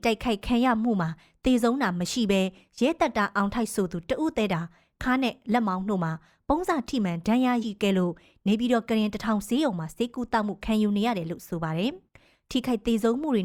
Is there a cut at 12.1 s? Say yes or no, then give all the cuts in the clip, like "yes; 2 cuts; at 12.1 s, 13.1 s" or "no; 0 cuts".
yes; 2 cuts; at 7.6 s, 12.1 s